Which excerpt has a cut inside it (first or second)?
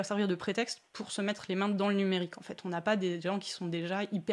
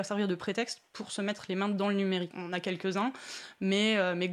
second